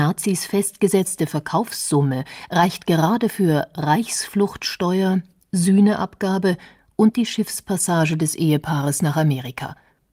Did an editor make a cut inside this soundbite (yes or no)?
no